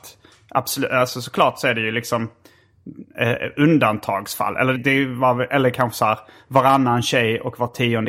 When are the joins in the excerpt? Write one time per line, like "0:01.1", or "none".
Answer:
0:04.8